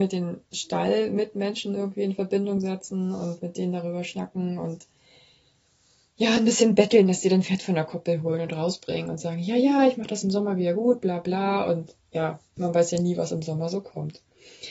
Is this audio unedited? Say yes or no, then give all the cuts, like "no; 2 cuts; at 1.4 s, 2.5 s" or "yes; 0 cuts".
yes; 0 cuts